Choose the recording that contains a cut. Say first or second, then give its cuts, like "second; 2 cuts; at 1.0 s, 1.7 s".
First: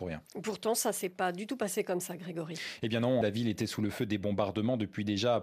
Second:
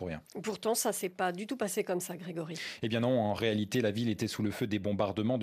first; 1 cut; at 3.2 s